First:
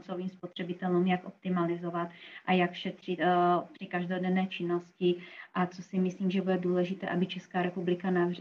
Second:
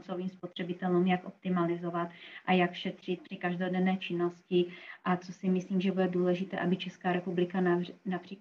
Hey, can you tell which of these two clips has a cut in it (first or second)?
second